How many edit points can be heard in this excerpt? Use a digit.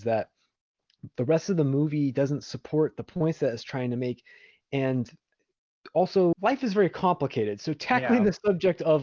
1